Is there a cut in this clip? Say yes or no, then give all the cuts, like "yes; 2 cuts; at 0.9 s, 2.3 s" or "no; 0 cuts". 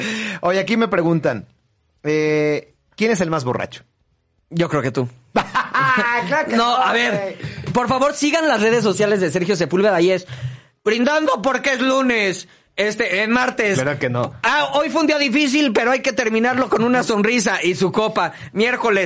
no; 0 cuts